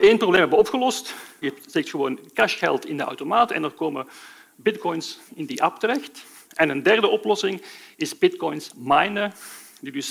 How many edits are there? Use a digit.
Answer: 1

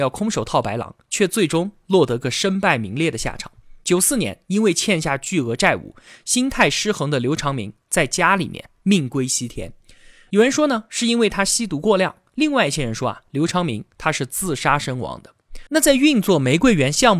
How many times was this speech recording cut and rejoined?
1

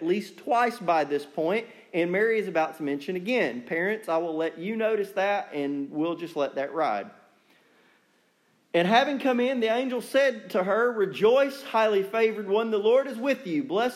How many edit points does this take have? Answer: 0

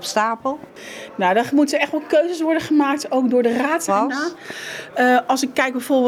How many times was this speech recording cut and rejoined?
1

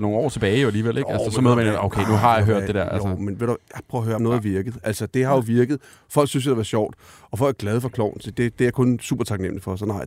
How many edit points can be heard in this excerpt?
1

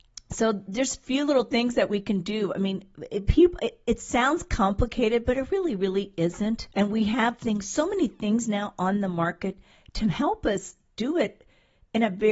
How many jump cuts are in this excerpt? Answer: 1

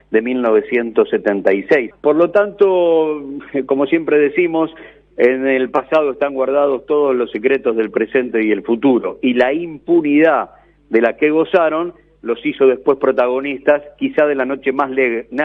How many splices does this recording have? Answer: 1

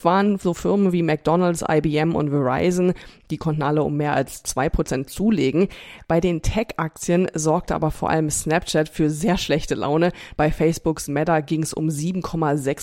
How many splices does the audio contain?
1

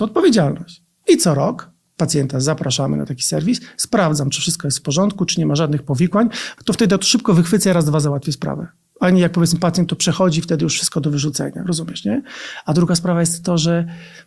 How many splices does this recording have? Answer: 1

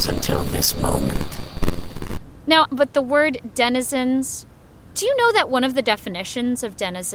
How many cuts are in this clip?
1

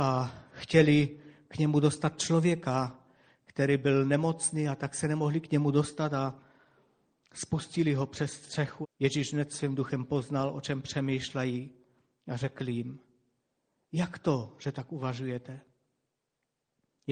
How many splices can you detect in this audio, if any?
1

